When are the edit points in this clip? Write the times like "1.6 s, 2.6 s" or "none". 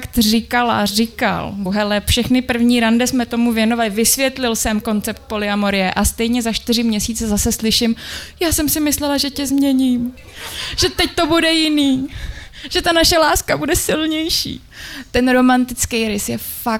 1.7 s